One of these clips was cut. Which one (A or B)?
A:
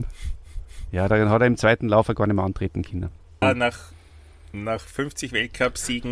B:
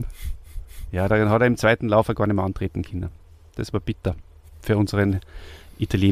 A